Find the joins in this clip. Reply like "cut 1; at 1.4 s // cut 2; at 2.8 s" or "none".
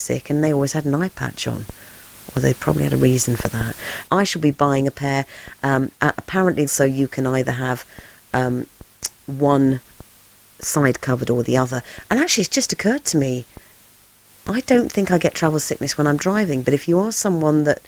cut 1; at 4.1 s // cut 2; at 6.7 s